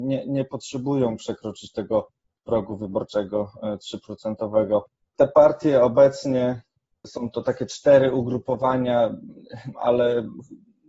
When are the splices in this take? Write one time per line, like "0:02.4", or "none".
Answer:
0:09.7